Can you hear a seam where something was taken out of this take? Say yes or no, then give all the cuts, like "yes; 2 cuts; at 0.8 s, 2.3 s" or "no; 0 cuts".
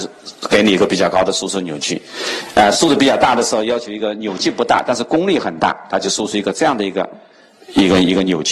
no; 0 cuts